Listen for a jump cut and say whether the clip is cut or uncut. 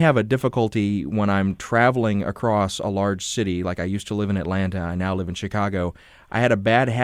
uncut